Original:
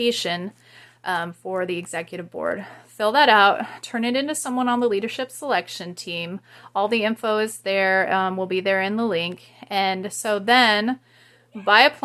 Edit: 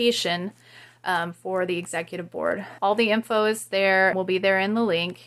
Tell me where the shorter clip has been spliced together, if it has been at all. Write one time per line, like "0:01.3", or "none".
0:02.8
0:04.1